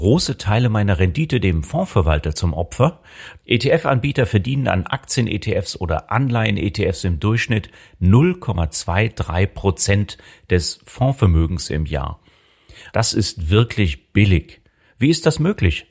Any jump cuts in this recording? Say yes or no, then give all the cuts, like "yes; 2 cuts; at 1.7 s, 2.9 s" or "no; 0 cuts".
yes; 2 cuts; at 3.4 s, 12.9 s